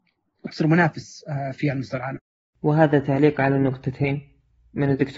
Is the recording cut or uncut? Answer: uncut